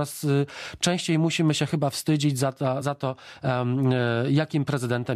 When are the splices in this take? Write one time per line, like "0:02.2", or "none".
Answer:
0:02.8